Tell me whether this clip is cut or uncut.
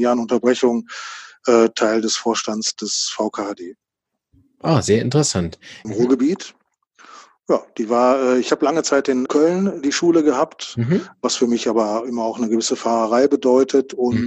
cut